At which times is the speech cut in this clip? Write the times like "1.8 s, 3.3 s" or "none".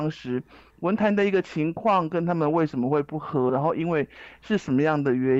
3.5 s